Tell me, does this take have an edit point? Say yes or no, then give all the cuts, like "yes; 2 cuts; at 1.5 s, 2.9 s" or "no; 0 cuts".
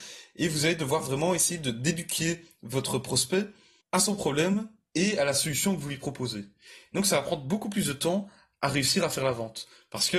no; 0 cuts